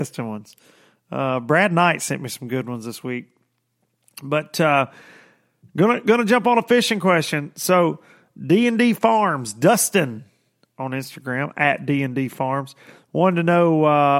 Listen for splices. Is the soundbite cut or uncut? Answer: uncut